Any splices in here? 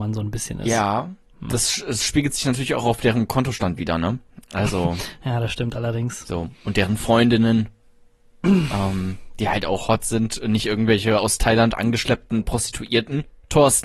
no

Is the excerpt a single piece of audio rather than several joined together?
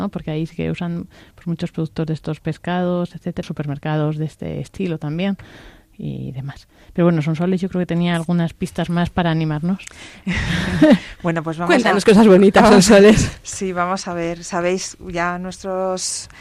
no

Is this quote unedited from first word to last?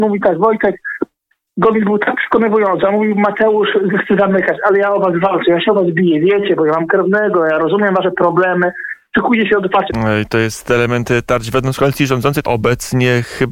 no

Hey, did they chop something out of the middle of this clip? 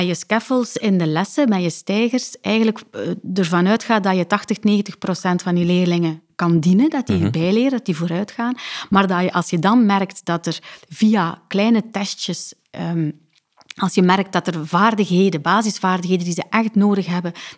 no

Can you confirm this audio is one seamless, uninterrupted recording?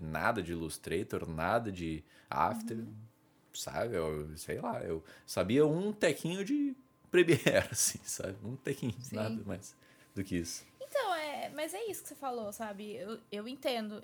yes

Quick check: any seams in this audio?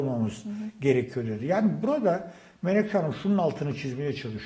no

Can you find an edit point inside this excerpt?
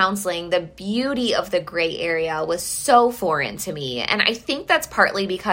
no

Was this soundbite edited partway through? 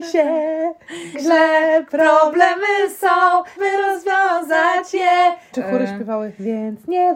yes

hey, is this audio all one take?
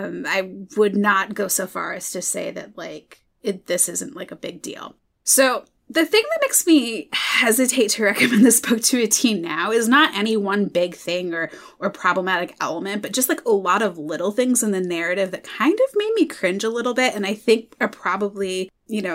yes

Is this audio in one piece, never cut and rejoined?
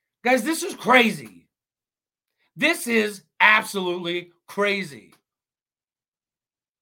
yes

